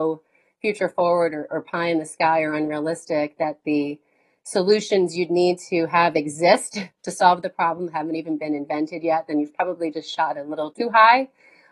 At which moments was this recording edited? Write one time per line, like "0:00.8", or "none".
0:10.7